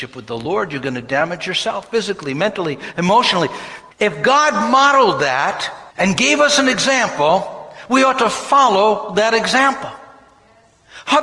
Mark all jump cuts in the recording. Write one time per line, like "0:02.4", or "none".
0:03.9
0:05.9